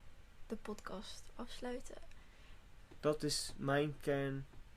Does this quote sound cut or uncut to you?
cut